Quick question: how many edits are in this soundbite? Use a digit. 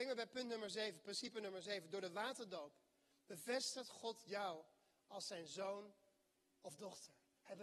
0